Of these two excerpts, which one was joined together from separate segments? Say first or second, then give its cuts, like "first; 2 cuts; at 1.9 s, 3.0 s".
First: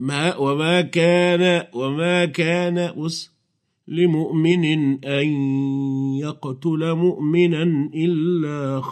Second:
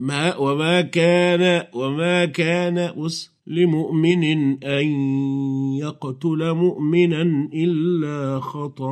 second; 1 cut; at 3.4 s